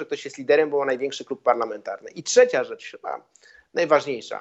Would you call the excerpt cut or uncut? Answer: uncut